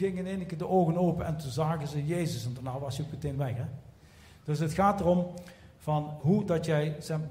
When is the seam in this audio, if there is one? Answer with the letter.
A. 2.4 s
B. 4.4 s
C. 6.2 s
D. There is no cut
C